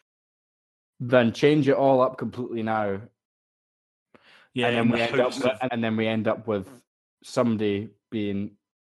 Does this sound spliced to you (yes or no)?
yes